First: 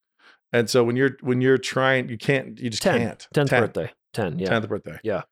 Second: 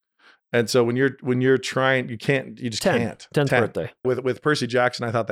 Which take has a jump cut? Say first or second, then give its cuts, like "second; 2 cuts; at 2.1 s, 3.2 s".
second; 1 cut; at 4.0 s